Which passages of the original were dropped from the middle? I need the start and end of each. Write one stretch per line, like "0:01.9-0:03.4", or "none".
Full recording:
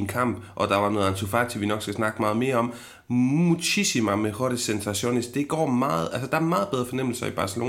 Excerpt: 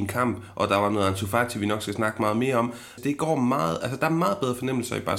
0:03.0-0:05.3